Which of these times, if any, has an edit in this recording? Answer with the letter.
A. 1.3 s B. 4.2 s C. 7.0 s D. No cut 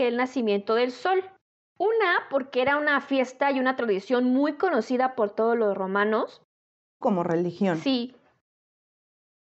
C